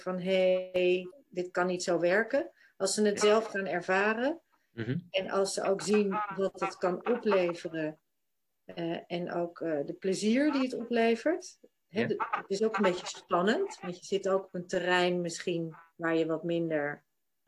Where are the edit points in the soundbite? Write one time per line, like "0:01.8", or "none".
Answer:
0:01.1

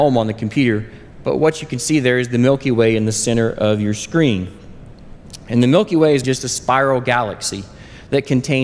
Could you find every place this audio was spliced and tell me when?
0:06.2

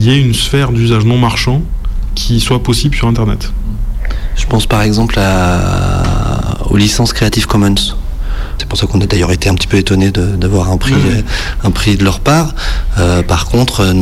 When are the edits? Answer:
0:08.6

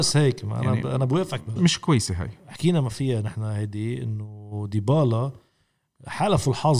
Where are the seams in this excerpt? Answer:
0:01.6

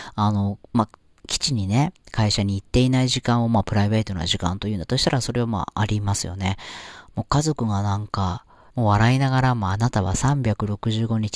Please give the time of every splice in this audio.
0:07.1
0:08.7

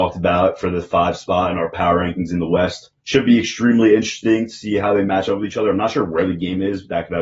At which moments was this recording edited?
0:03.0

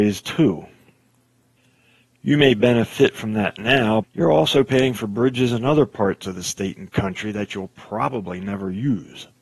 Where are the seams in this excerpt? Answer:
0:04.0

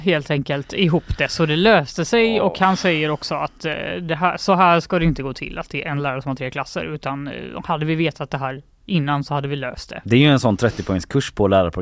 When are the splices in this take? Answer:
none

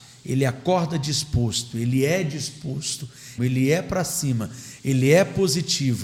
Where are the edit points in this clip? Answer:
0:03.4

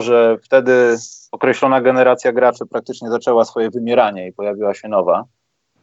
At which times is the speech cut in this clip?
none

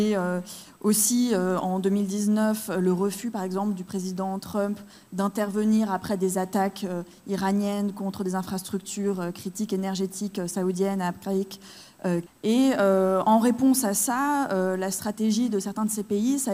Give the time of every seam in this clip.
0:12.3

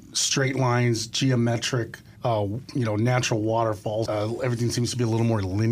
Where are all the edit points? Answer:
0:02.2
0:04.1

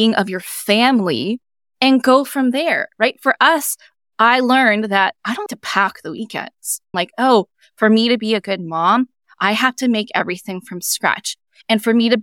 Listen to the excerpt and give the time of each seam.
0:05.5
0:06.9

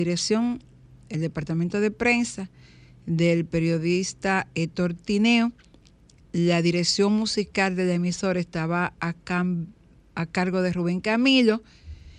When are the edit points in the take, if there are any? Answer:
none

